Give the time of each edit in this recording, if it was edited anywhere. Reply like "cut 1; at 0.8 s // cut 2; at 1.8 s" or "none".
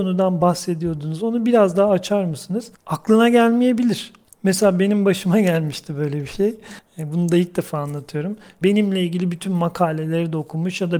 cut 1; at 8.6 s